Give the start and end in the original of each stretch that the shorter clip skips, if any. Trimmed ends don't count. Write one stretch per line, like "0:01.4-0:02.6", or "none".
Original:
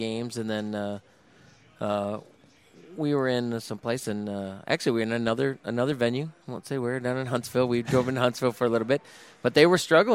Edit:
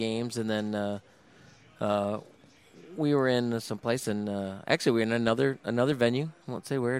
none

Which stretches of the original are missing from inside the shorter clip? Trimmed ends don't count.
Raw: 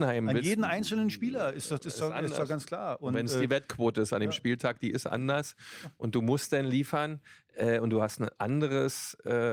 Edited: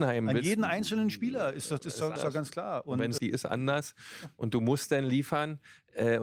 0:02.2-0:02.3
0:03.3-0:04.8

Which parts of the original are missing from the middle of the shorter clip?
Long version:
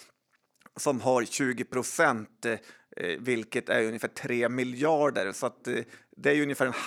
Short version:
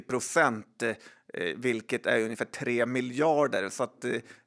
none

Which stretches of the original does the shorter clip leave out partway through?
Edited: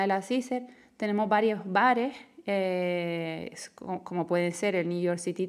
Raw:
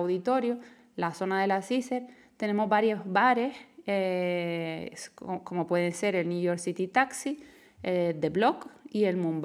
none

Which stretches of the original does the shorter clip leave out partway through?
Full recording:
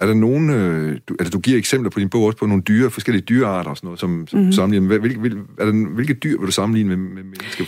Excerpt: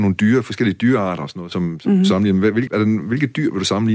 0:05.1-0:05.5

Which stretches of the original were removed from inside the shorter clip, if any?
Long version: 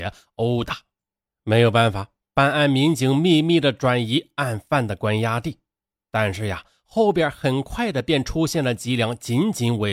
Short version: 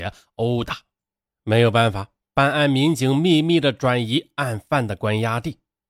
none

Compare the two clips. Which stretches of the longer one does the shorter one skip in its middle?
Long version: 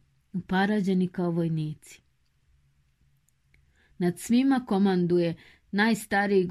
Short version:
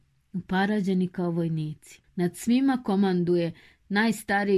0:02.0-0:03.9

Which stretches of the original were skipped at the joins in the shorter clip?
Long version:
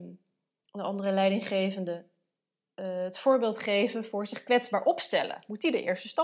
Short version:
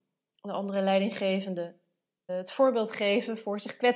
0:02.6-0:03.0

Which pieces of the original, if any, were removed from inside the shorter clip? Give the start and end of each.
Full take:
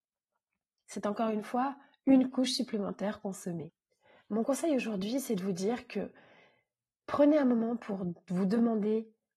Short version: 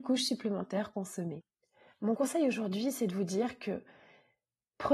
none

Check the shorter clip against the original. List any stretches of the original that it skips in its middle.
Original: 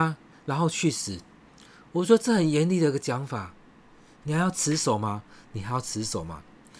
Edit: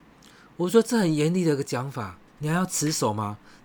0:03.6-0:04.1

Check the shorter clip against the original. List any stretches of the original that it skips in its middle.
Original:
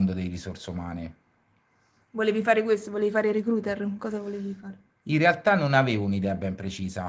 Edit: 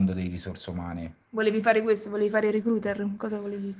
0:01.2-0:02.0

